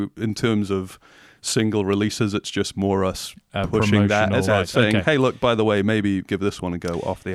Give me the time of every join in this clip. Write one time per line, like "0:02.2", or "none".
0:04.5
0:06.3